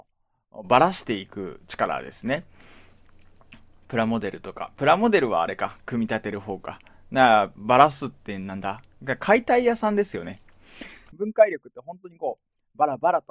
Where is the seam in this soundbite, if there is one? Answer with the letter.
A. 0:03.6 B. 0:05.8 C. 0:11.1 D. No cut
C